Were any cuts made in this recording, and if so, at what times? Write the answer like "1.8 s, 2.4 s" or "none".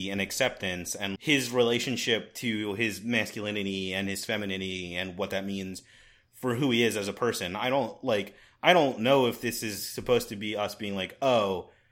1.2 s